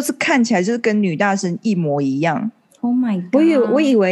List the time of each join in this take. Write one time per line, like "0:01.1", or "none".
none